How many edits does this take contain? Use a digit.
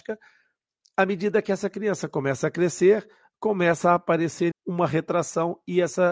1